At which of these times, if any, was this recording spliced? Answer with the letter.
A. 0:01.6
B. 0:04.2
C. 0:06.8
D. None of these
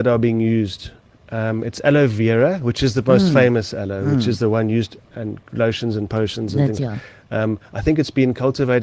C